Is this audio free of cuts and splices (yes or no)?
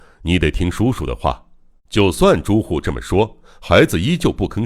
no